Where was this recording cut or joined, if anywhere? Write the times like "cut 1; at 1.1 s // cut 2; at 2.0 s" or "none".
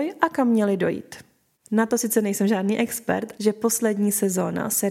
cut 1; at 1.5 s // cut 2; at 3.4 s